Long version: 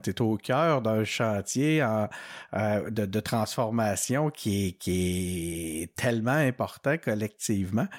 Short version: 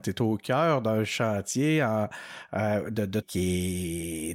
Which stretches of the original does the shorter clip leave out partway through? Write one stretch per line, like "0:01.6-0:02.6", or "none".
0:03.2-0:04.7